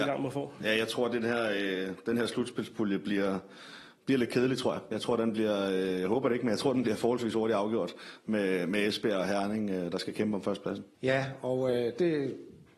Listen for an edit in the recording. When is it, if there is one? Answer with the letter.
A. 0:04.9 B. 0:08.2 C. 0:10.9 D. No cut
C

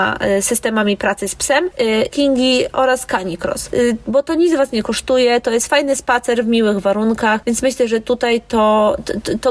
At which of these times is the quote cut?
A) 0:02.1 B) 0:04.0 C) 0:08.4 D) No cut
A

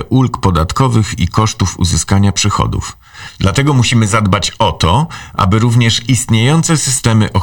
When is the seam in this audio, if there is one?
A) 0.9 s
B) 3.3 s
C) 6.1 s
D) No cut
D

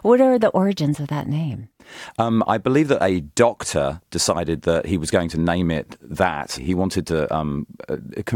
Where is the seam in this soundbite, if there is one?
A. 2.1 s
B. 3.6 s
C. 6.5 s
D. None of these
D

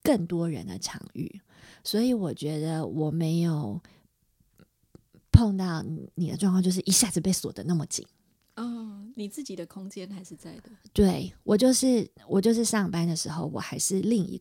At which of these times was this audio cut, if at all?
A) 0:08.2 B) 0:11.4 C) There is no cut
C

